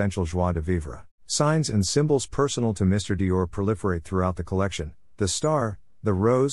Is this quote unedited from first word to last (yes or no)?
no